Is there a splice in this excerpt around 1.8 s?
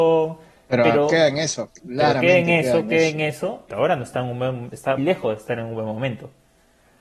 no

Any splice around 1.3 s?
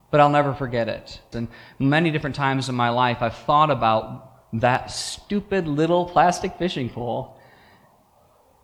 yes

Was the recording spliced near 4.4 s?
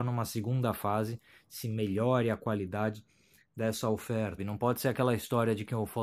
yes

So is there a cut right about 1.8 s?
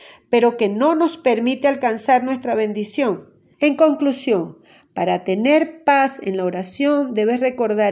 no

